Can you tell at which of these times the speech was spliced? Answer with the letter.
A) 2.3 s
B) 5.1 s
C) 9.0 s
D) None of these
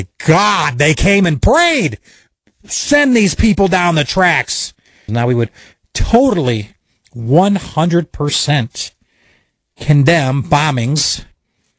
B